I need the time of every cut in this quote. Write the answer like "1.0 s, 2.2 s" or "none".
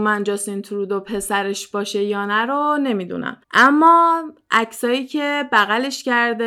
3.4 s